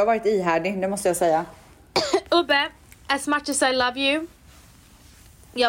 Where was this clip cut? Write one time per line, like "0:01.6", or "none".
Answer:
none